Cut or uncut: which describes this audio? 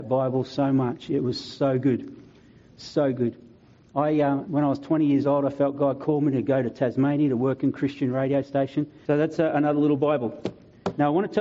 cut